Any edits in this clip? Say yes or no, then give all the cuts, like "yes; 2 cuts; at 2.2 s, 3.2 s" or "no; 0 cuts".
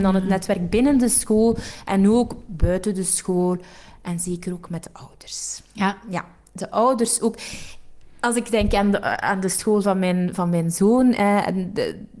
no; 0 cuts